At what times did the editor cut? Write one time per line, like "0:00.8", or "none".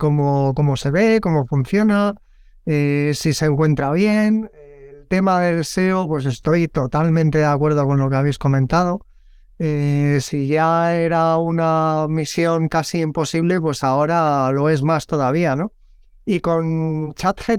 none